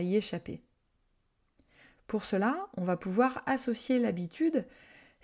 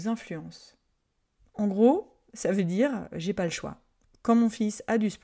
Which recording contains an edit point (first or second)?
second